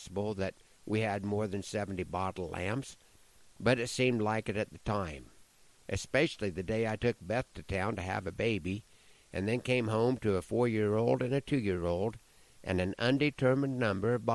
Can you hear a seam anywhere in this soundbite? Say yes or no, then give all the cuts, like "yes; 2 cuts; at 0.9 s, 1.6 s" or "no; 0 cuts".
no; 0 cuts